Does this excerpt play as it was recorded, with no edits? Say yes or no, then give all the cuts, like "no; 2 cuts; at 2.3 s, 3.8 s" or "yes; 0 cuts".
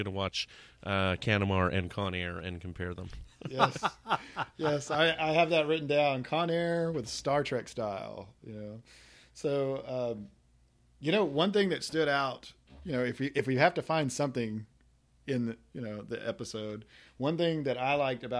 yes; 0 cuts